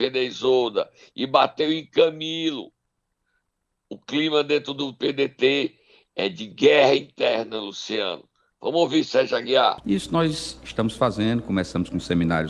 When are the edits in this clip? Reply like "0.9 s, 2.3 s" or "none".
none